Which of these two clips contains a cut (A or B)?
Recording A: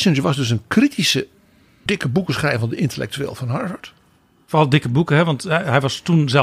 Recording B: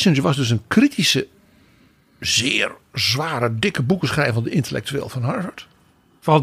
A